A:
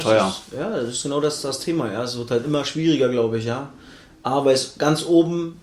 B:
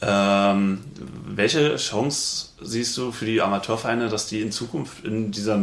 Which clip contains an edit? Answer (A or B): A